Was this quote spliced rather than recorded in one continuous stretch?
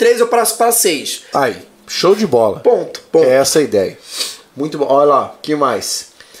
yes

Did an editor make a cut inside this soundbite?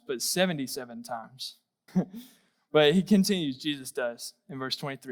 yes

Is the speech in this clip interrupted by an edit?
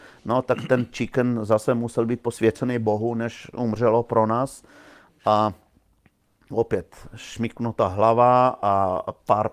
no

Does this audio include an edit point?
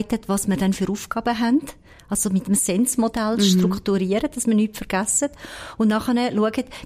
no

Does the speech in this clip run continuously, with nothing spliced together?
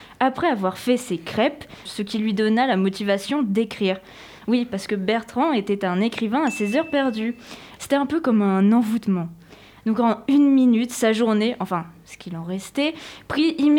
no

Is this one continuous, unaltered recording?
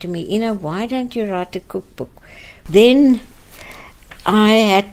yes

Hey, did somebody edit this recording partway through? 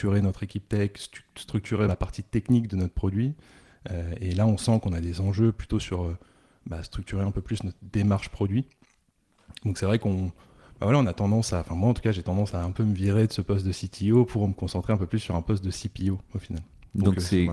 yes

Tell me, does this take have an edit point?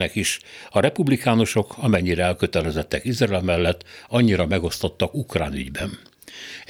no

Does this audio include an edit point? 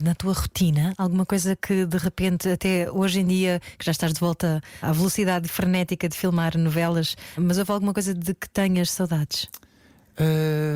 yes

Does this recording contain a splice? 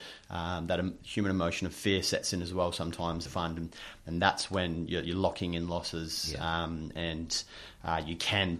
yes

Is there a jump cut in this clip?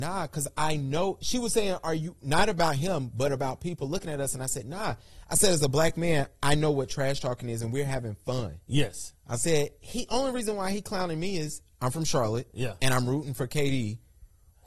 no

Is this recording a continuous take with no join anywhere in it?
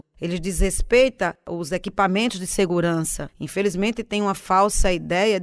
yes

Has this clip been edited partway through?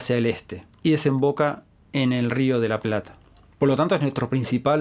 no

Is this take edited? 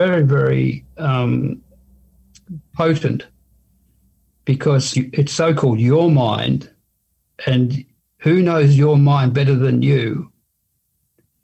yes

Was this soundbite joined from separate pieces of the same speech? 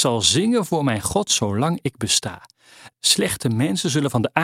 yes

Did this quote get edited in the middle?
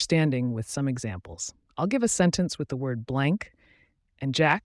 no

